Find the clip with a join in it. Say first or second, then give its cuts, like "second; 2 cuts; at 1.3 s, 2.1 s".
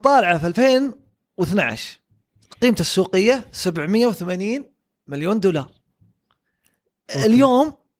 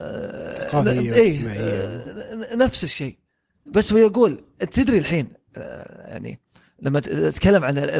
second; 1 cut; at 3.7 s